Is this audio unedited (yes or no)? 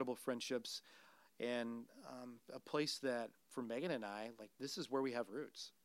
yes